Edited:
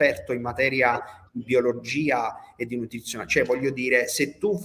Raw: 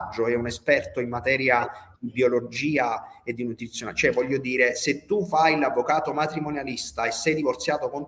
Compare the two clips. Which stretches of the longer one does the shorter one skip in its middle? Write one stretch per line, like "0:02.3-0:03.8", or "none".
none